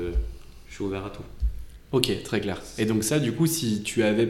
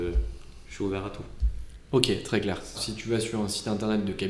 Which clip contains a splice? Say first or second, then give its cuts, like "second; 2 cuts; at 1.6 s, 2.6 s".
second; 1 cut; at 2.7 s